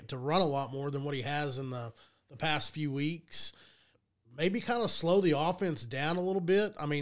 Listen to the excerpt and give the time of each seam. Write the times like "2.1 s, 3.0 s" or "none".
none